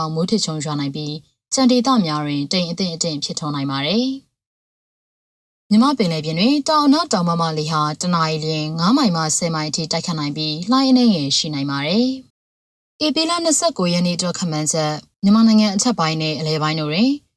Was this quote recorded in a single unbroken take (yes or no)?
no